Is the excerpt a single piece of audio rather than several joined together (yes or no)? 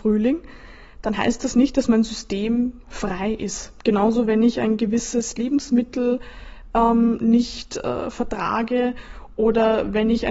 yes